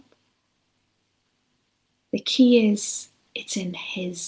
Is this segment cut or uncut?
uncut